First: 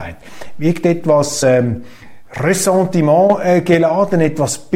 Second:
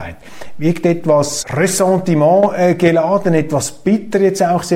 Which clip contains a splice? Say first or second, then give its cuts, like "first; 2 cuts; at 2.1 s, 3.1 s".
second; 1 cut; at 1.4 s